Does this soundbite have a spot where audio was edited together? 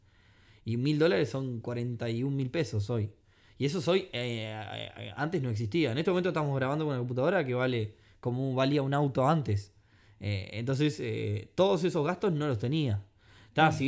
no; 0 cuts

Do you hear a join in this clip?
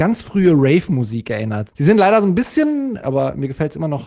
yes; 2 cuts; at 1.7 s, 3.0 s

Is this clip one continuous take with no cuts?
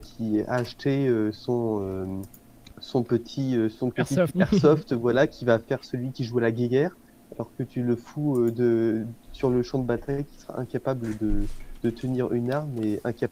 no; 1 cut; at 4.3 s

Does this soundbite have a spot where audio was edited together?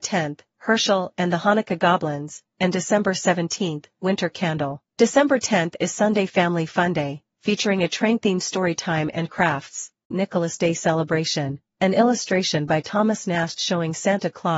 yes; 2 cuts; at 4.9 s, 10.1 s

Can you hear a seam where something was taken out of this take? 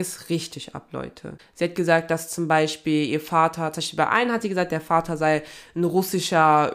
yes; 1 cut; at 1.4 s

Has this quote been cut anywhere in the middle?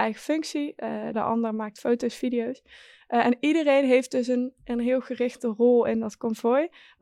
yes; 1 cut; at 1.1 s

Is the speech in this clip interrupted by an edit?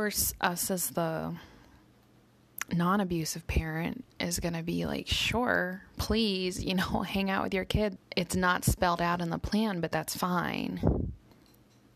yes; 1 cut; at 8.0 s

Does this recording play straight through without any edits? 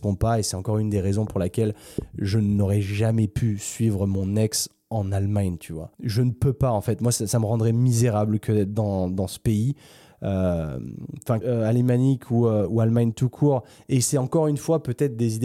no; 2 cuts; at 5.9 s, 11.4 s

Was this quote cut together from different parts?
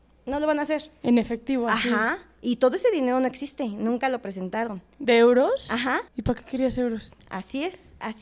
yes; 3 cuts; at 1.0 s, 6.1 s, 7.2 s

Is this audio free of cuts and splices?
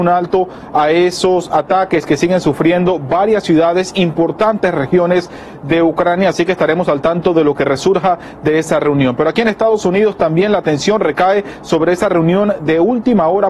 yes; 0 cuts

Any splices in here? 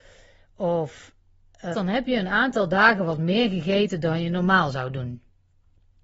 yes; 1 cut; at 1.7 s

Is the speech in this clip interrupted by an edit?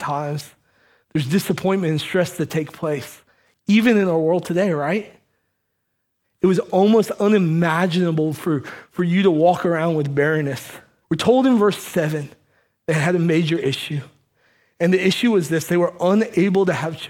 yes; 2 cuts; at 6.2 s, 11.0 s

